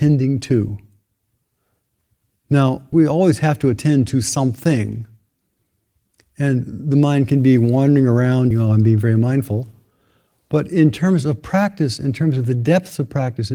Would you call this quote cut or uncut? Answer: cut